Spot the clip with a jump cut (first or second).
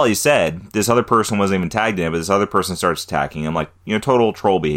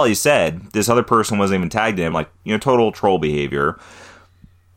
second